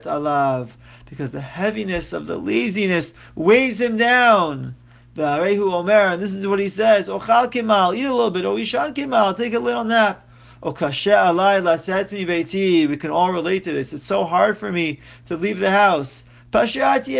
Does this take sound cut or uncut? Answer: uncut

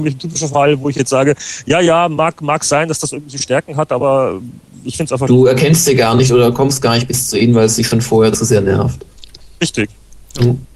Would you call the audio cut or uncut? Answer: uncut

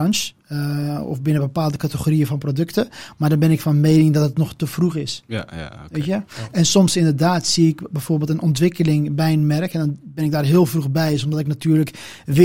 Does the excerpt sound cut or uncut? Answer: uncut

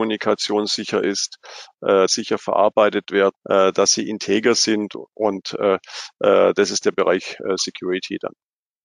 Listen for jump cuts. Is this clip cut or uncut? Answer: cut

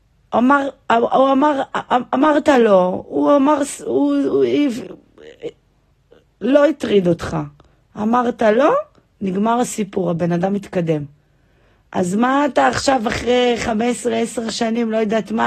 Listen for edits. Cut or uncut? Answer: uncut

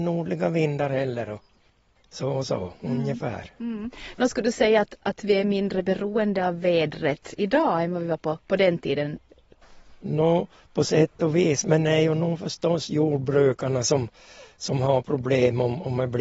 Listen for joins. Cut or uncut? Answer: uncut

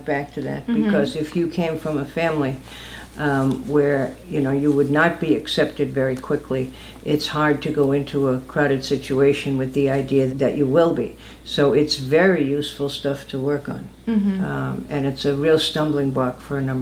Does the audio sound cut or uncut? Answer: cut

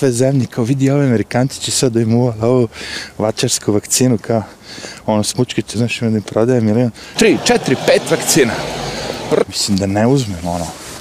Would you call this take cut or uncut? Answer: cut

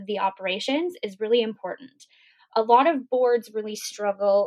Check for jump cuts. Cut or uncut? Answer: uncut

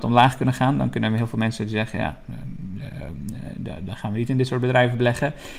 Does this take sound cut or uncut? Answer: uncut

